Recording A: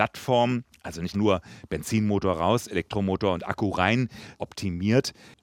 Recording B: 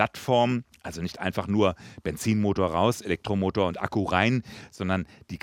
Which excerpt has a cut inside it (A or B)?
A